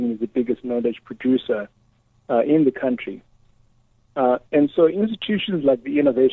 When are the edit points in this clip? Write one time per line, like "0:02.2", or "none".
none